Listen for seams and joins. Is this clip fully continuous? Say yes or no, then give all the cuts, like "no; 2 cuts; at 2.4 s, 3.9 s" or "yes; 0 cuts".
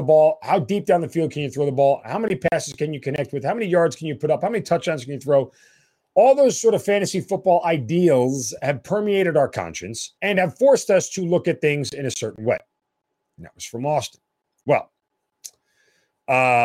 no; 2 cuts; at 10.2 s, 13.3 s